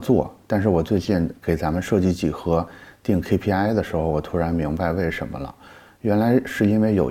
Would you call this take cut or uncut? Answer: uncut